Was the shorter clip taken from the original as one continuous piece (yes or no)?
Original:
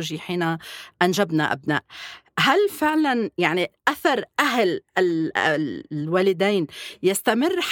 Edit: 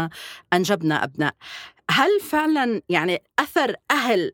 yes